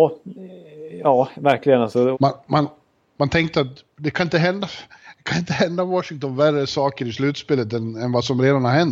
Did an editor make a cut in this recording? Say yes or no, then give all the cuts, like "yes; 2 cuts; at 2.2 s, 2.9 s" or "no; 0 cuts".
yes; 1 cut; at 2.1 s